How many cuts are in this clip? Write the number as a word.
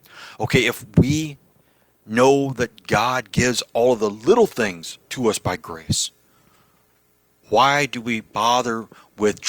zero